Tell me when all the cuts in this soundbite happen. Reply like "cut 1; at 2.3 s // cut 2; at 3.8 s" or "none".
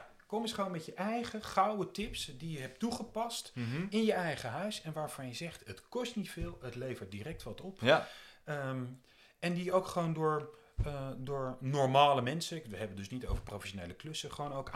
none